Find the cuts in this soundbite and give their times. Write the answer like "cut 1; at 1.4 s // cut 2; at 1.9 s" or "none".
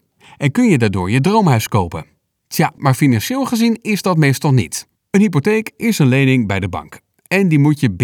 cut 1; at 2.8 s // cut 2; at 4.9 s